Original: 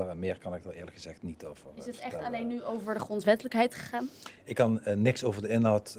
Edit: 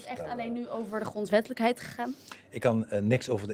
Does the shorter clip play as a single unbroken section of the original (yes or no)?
yes